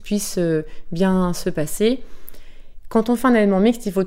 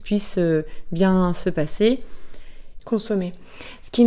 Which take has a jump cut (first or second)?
second